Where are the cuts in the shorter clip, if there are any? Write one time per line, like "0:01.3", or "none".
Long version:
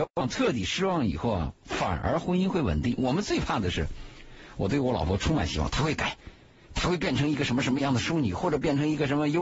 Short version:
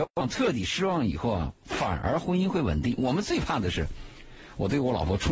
none